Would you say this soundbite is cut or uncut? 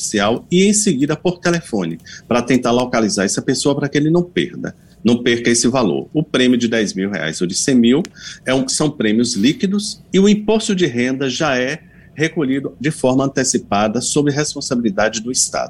uncut